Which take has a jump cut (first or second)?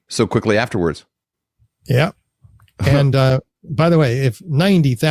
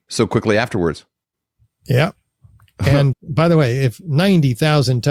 second